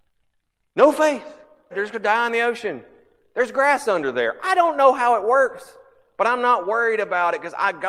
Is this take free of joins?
no; 1 cut; at 1.7 s

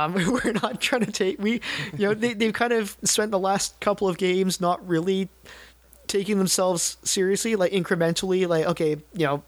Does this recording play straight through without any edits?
yes; 0 cuts

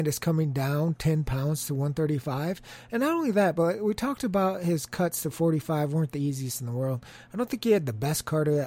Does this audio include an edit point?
no; 0 cuts

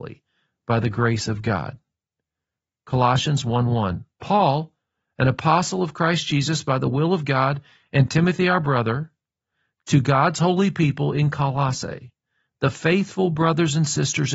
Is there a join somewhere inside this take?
no; 0 cuts

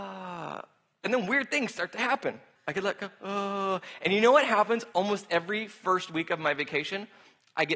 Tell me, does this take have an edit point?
yes; 1 cut; at 2.6 s

